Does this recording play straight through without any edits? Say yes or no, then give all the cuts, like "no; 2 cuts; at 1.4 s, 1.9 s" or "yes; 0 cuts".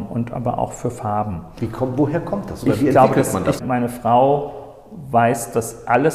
no; 1 cut; at 3.6 s